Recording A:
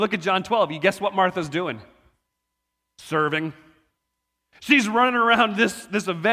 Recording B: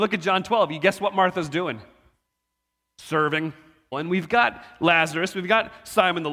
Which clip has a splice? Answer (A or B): B